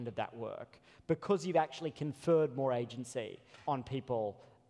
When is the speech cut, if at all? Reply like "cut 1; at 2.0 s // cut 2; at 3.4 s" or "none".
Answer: cut 1; at 3.6 s